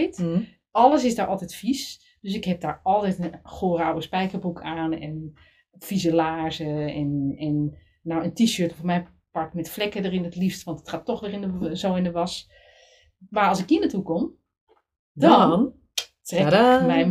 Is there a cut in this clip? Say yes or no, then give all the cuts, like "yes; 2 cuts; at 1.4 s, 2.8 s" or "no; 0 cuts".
no; 0 cuts